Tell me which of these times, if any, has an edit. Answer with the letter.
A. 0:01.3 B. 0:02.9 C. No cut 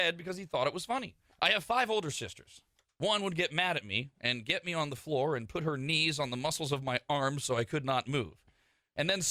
A